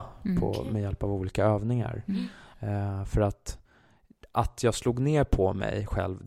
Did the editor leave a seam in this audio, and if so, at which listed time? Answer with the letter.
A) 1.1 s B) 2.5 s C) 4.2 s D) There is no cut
B